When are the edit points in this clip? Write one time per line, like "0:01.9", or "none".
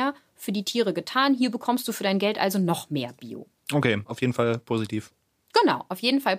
0:04.0